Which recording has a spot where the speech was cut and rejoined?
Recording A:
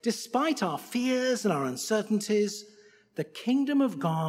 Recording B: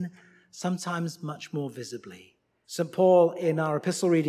B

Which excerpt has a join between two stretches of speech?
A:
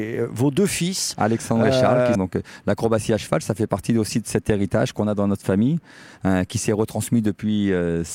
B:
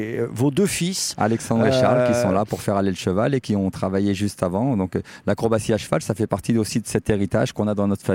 A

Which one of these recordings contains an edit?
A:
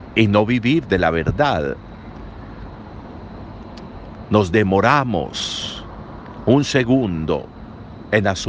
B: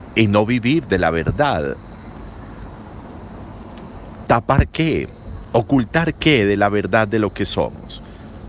B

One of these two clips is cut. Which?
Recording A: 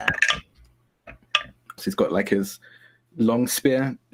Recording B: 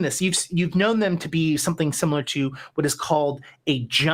A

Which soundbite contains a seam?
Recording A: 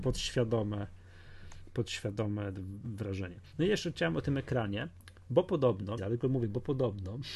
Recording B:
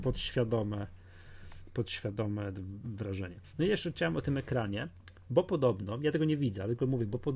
A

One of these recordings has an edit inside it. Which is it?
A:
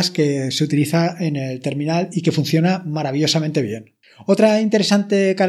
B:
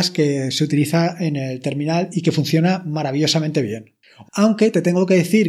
B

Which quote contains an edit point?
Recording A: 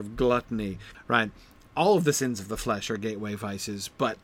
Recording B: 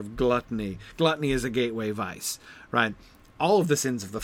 A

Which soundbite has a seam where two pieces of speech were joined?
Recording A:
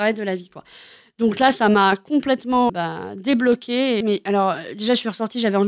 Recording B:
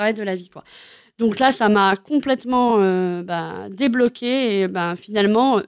A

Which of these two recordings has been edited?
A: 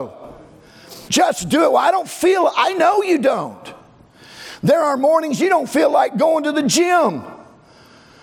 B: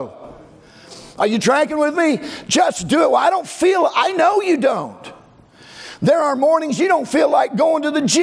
A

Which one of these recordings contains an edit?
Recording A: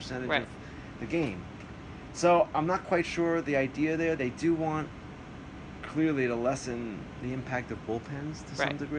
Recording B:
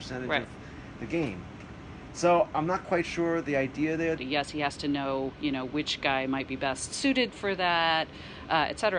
B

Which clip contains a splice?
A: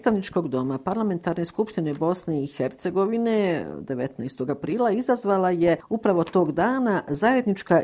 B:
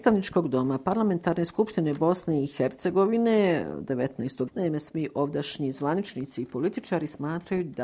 B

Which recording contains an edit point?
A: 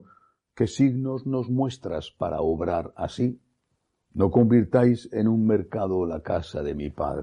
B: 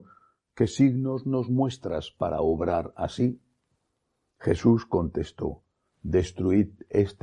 A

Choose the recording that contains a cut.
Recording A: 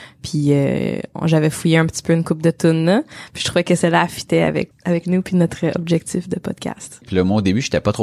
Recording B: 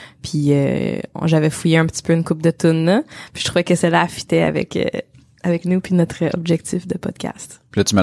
A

